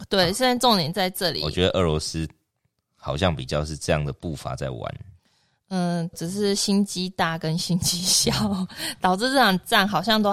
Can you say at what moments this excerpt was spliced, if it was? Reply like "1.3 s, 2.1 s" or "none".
6.1 s